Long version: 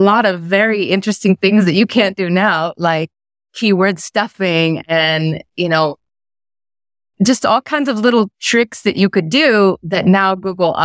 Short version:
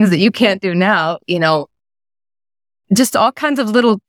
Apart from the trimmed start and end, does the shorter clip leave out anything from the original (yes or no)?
yes